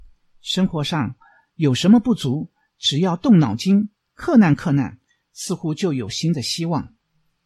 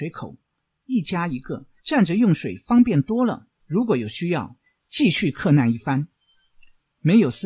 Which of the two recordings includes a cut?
second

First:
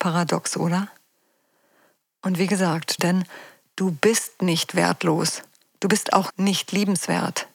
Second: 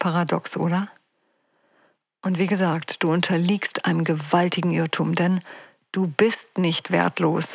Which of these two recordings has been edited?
first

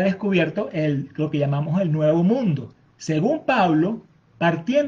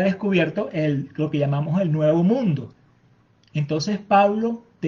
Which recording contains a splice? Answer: first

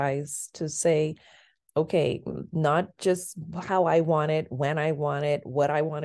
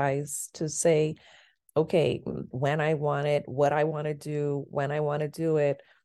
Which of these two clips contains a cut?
second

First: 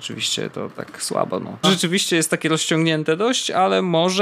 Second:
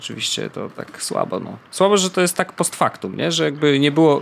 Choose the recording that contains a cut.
first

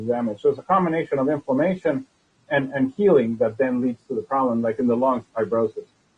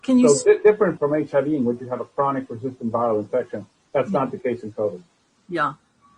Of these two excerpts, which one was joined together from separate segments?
second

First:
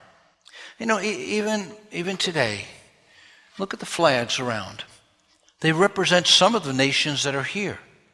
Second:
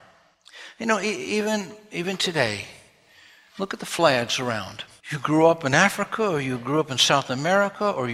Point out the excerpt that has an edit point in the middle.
second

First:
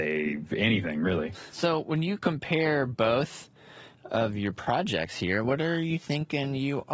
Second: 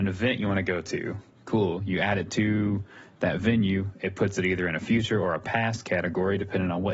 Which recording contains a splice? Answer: first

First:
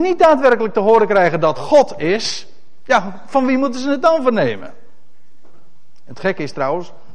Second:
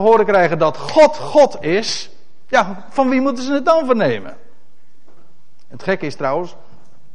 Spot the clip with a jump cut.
first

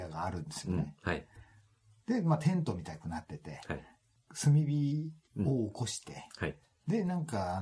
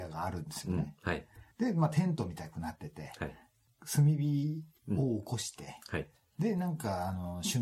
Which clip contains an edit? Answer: second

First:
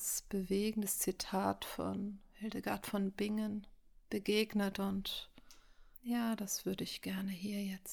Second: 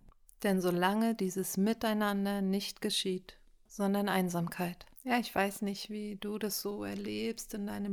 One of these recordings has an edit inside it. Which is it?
second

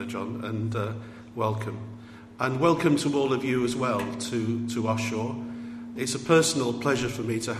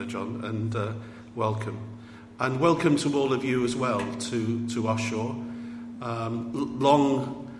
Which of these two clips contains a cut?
first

